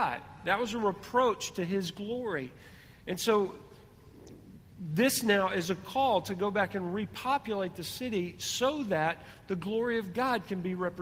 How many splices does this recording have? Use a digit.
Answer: 0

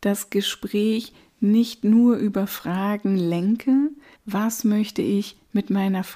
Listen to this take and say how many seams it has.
1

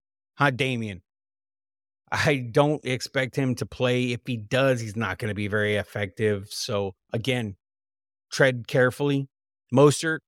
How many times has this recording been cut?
1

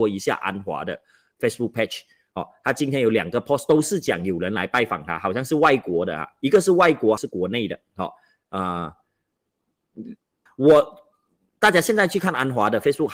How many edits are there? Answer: 2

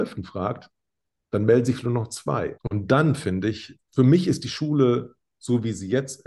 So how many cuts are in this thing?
2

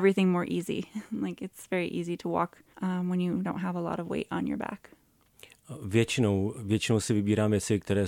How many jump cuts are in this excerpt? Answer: 1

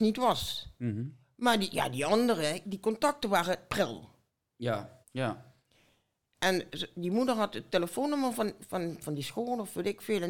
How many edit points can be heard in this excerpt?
2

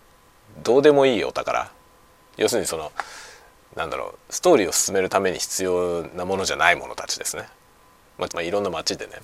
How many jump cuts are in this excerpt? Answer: 1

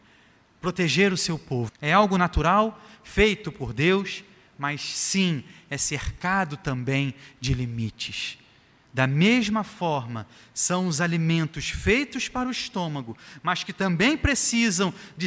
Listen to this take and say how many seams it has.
1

